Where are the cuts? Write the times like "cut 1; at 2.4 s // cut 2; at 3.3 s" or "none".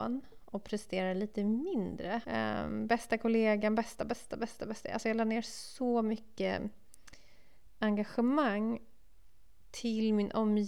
cut 1; at 2.2 s